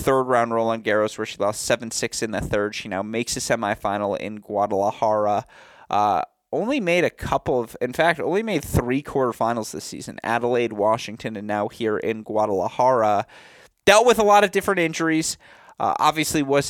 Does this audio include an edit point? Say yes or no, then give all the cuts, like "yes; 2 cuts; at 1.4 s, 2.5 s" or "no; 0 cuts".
no; 0 cuts